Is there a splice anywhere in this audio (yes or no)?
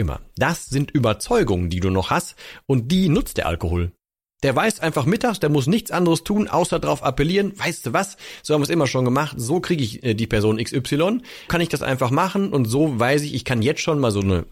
yes